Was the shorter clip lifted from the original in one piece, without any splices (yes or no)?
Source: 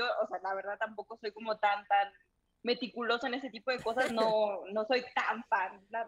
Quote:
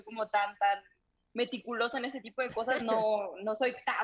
yes